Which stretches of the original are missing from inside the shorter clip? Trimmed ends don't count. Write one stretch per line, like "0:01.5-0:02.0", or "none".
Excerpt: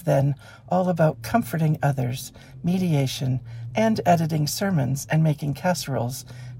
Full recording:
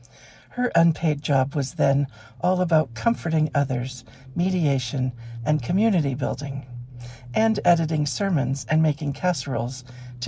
0:05.4-0:07.3